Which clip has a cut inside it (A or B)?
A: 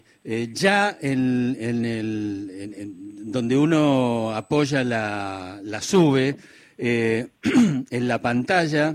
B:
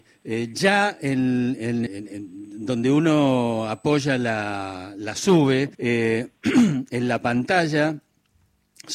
B